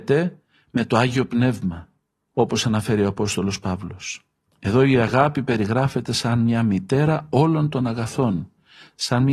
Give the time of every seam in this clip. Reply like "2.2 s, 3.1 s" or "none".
4.5 s